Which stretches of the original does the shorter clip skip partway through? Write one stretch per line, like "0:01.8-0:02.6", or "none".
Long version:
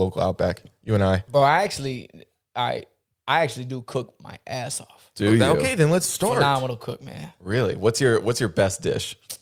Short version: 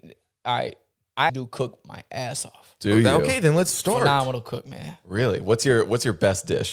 0:03.4-0:03.6